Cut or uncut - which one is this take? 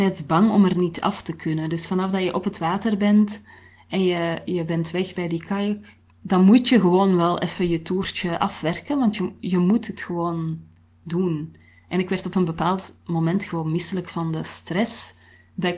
cut